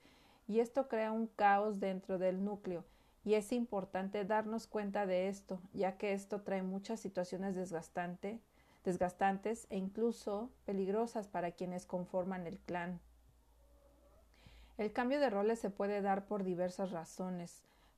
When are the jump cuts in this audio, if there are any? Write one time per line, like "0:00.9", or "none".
none

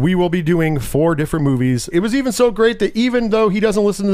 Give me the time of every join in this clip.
0:01.9

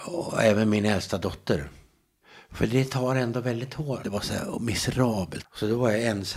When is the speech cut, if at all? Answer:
0:04.0
0:05.4

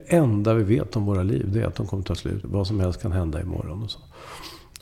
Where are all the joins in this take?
0:02.4

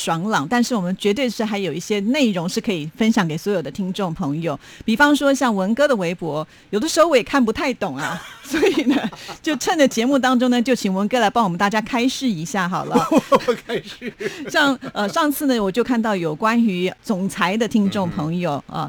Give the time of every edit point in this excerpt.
none

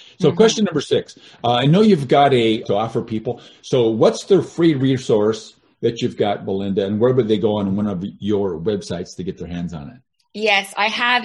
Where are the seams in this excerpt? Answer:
0:02.6

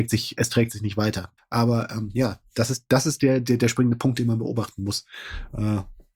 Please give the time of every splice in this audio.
0:01.4

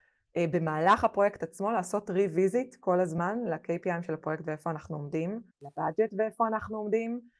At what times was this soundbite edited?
0:05.5

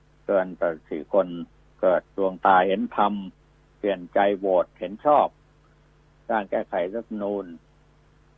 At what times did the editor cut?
0:02.0

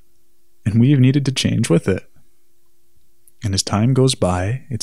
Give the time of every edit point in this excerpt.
none

